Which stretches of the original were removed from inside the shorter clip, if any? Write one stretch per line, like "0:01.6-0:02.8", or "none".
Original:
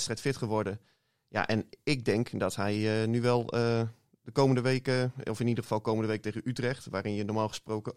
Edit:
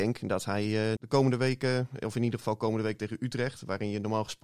0:03.1-0:04.2